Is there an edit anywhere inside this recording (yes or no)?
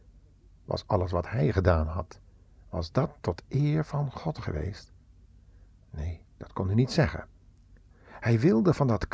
yes